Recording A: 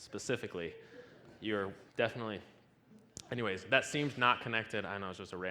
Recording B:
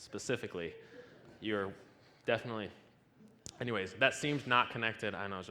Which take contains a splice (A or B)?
A